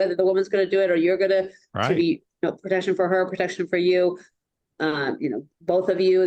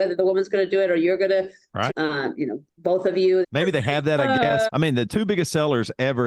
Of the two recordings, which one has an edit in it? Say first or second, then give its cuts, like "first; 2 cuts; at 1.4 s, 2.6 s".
second; 3 cuts; at 1.9 s, 3.4 s, 4.7 s